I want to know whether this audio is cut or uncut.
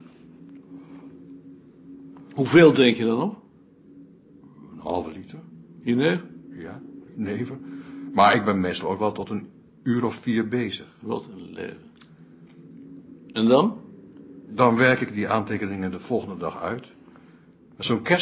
uncut